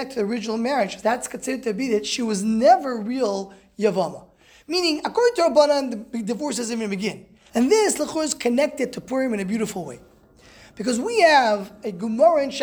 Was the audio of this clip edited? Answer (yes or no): yes